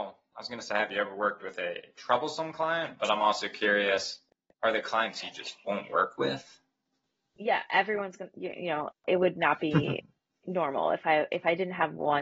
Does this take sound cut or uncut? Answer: uncut